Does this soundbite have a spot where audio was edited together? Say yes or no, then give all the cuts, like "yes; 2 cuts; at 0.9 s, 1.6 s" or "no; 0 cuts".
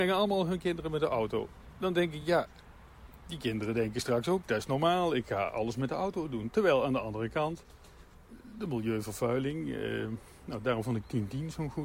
no; 0 cuts